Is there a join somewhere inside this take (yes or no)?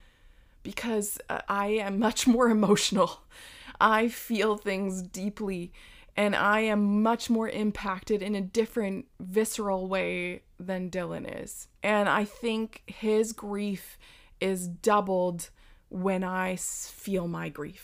yes